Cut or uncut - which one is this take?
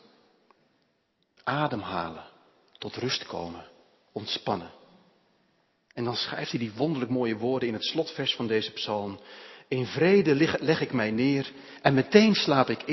cut